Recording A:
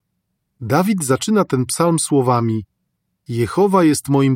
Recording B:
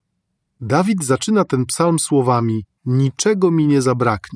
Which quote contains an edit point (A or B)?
B